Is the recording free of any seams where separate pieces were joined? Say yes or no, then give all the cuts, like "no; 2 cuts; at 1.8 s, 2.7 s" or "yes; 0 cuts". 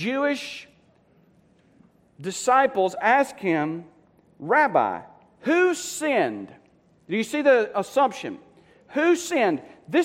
yes; 0 cuts